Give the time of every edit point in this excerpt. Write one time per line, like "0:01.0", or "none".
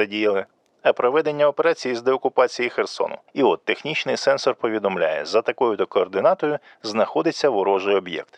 0:03.3